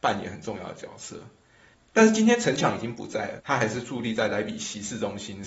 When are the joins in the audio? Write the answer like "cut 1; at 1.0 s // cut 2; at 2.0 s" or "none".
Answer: cut 1; at 1.7 s // cut 2; at 3.4 s